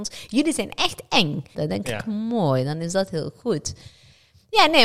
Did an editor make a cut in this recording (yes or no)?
yes